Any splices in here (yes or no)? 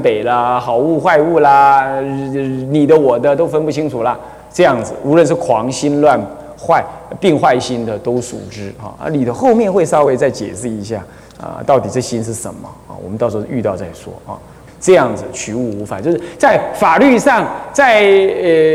yes